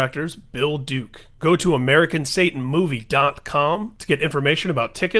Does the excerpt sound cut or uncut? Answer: cut